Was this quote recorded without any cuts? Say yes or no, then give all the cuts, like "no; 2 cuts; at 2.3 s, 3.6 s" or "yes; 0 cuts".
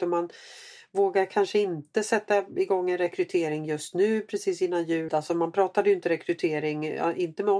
no; 1 cut; at 5.1 s